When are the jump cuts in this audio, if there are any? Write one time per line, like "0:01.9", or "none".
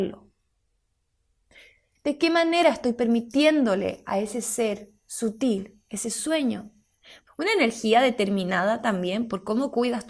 0:02.0
0:07.3